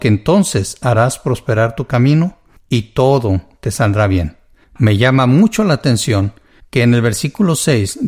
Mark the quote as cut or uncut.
uncut